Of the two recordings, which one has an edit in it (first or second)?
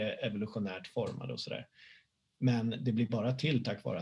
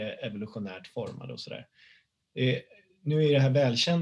second